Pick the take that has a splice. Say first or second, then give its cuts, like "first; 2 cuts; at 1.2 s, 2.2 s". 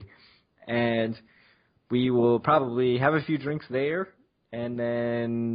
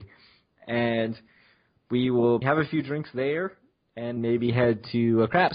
second; 2 cuts; at 2.4 s, 4.2 s